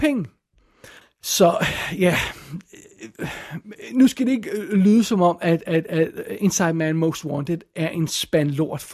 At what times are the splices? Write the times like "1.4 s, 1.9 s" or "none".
1.0 s

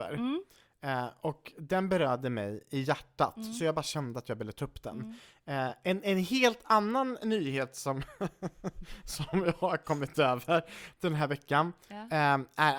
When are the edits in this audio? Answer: none

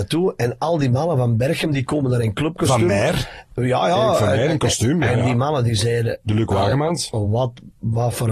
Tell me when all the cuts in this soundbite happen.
none

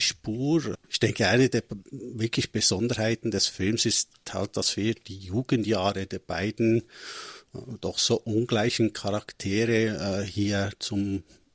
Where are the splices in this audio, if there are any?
none

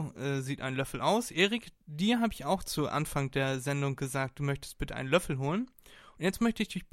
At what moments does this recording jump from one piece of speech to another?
none

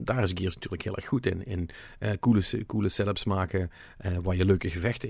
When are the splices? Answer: none

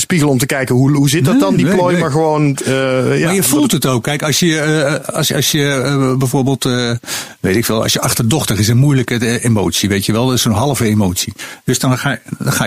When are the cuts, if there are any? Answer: 8.0 s

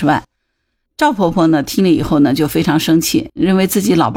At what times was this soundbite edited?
none

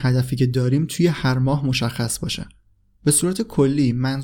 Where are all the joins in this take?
none

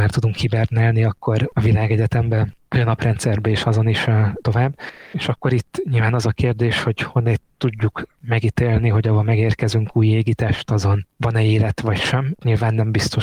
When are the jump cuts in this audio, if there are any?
none

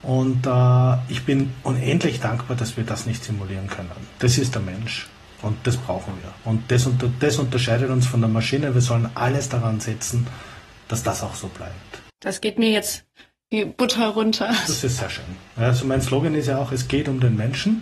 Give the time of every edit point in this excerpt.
4.1 s, 6.4 s, 12.1 s

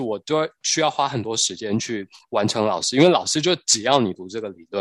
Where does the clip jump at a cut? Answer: none

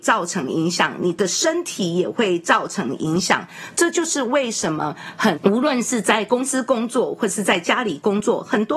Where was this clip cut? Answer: 5.3 s

